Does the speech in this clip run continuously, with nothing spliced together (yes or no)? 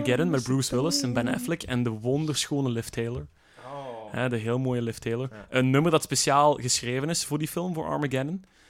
yes